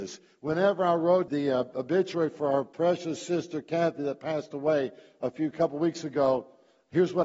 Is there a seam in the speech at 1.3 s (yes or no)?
yes